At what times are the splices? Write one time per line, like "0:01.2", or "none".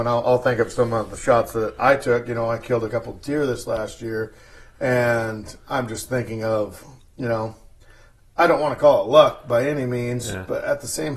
none